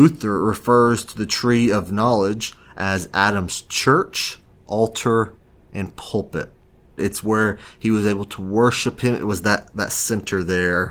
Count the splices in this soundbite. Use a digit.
1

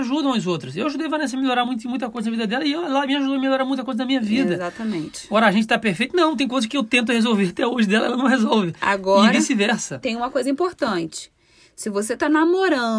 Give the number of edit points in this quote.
0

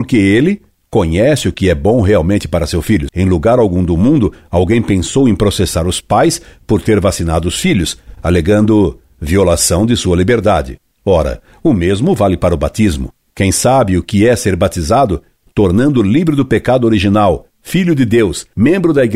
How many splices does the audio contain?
1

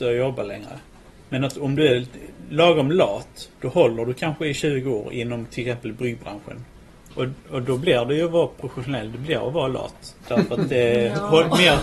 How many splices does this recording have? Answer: 1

